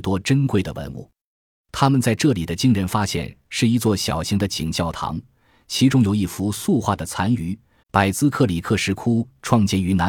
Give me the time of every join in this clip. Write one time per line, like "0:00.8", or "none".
0:04.7
0:07.8